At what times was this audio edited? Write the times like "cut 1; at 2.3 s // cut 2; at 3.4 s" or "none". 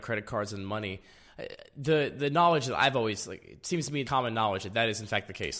cut 1; at 4.0 s